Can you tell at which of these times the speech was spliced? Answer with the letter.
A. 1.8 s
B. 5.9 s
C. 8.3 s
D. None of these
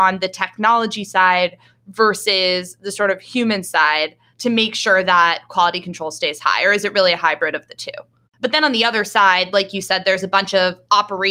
C